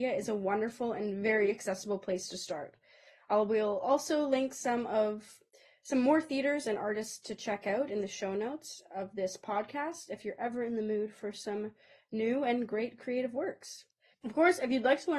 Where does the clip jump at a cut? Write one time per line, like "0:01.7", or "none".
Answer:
0:14.1

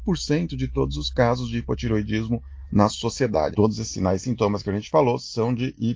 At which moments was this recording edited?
0:03.5

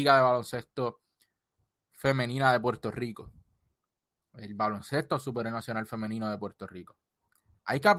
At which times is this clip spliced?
none

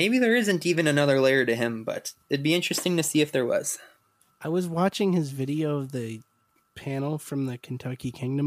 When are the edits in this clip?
none

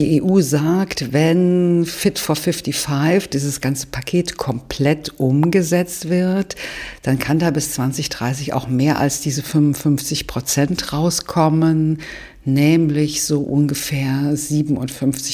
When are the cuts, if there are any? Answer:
none

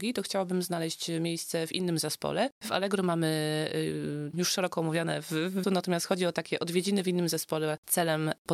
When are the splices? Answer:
0:04.3
0:05.6

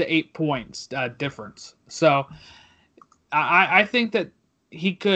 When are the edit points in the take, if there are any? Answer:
none

